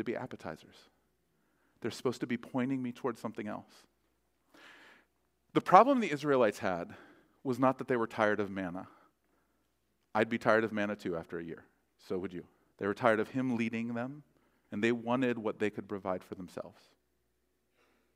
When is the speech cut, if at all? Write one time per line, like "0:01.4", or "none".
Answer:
0:12.7
0:14.7